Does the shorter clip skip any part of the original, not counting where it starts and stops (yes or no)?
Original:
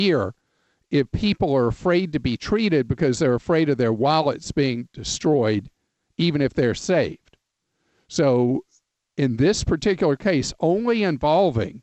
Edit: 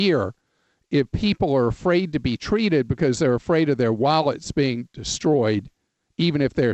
no